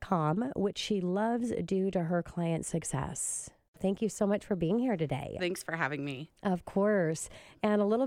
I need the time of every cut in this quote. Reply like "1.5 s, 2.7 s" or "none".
3.8 s, 5.4 s